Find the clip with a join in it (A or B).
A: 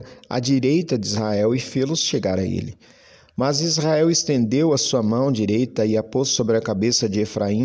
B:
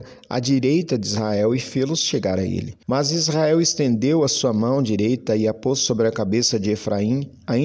B